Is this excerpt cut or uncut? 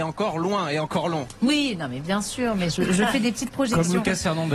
uncut